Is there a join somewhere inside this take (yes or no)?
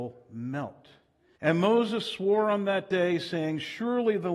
yes